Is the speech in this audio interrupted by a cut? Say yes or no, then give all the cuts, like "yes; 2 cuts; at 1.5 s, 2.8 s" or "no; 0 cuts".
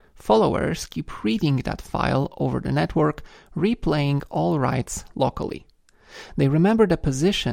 no; 0 cuts